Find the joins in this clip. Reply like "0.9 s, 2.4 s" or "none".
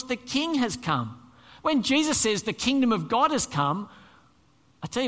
1.6 s